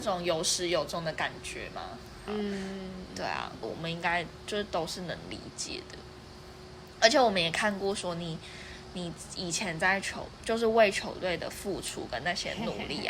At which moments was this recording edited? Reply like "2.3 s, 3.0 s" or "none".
2.3 s, 3.6 s